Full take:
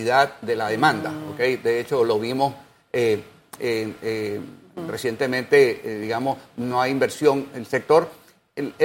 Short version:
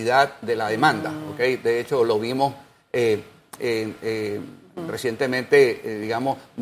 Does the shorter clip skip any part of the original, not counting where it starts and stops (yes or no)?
no